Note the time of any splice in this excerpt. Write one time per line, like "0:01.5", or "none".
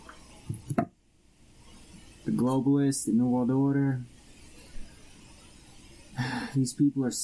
none

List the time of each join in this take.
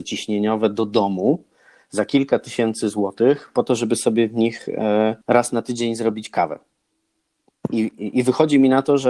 0:05.2

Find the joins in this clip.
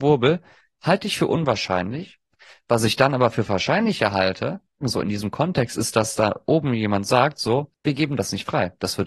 0:04.8

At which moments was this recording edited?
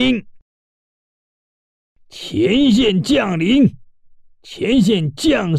none

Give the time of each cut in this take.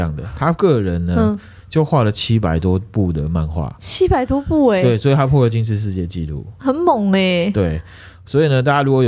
none

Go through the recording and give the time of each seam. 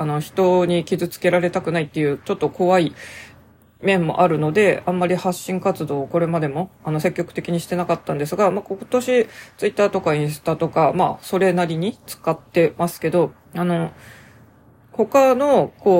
0:13.4

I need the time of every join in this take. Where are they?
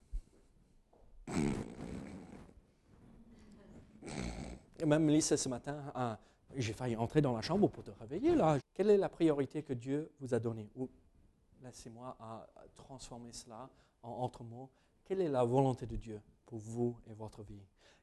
0:06.5
0:08.6

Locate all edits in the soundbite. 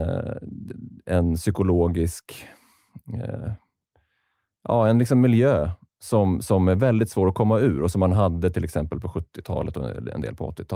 none

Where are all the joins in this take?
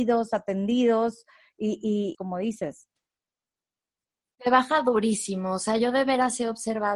0:02.1

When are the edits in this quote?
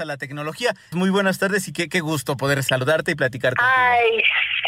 0:00.9

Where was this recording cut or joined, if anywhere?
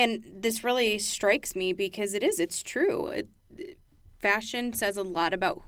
none

